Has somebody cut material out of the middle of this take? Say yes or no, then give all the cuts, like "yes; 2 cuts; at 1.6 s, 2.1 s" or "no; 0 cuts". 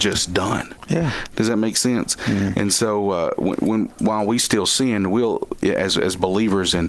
no; 0 cuts